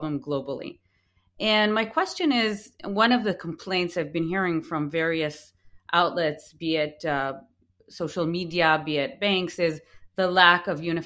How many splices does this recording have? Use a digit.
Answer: 0